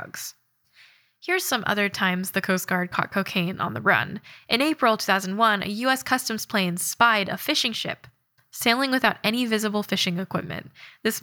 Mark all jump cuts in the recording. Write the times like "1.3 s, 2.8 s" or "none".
8.4 s